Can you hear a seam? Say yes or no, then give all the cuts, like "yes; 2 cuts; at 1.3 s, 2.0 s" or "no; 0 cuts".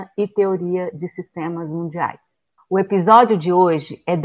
yes; 1 cut; at 2.6 s